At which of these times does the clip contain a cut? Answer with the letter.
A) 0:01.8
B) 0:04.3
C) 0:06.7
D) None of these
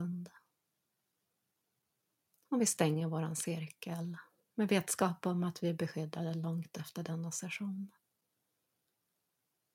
D